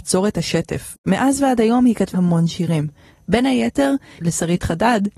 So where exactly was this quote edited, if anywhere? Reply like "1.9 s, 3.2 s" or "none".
2.1 s, 4.2 s